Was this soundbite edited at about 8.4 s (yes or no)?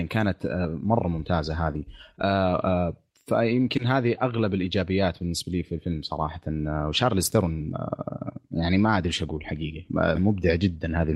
no